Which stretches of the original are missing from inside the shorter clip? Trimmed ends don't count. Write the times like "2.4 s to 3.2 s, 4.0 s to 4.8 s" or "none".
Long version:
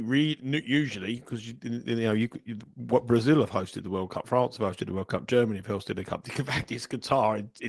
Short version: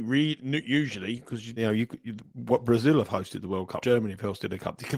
1.6 s to 2.0 s, 4.2 s to 5.3 s